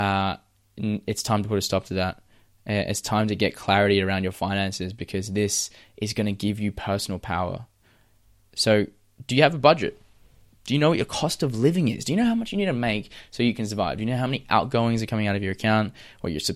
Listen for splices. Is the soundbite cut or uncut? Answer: uncut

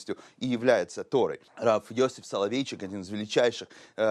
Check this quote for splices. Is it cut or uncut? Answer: cut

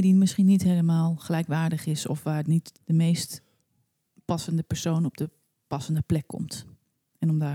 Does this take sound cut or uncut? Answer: cut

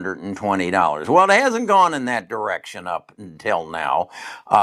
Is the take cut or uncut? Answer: uncut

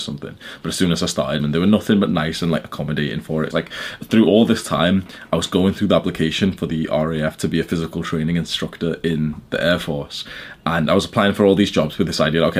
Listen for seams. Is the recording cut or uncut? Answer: cut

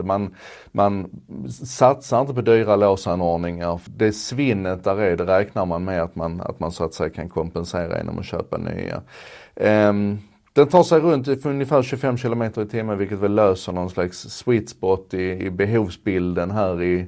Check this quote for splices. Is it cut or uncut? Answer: cut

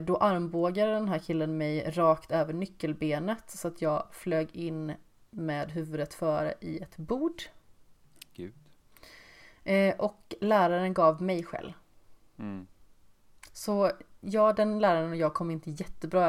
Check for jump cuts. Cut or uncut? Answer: uncut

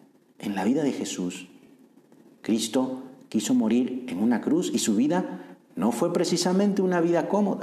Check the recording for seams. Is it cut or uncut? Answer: uncut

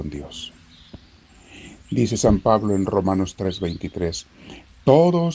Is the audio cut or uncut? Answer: uncut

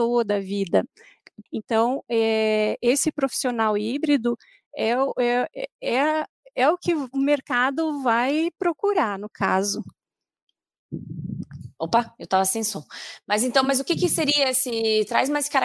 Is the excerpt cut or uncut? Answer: cut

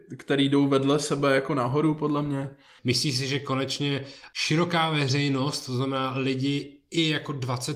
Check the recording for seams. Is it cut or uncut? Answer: cut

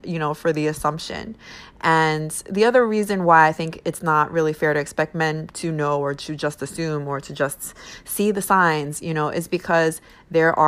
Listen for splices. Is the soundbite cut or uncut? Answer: uncut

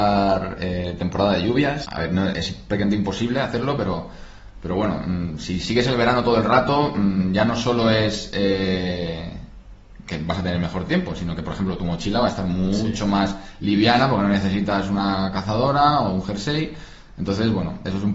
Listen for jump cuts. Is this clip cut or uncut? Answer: cut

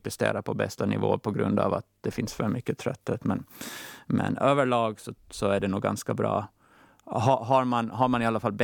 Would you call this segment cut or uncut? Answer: uncut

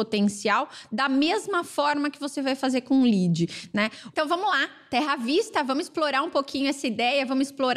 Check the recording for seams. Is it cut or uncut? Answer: cut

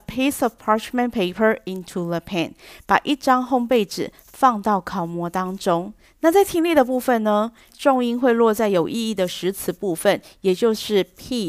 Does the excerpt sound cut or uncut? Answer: cut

